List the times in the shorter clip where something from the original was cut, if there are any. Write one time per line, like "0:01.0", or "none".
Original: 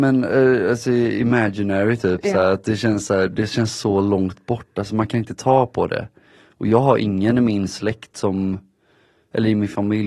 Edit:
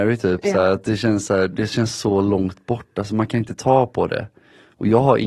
none